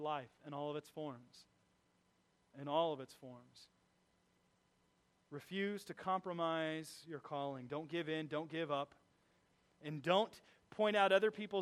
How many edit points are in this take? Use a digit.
0